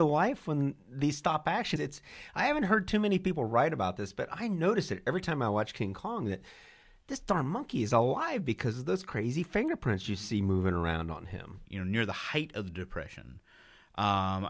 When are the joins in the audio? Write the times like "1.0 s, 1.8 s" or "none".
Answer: 1.8 s, 11.6 s